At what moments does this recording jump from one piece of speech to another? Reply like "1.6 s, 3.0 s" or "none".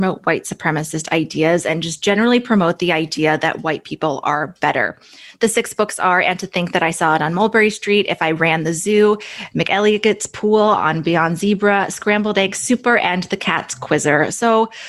none